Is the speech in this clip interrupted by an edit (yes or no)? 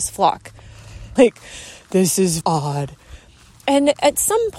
yes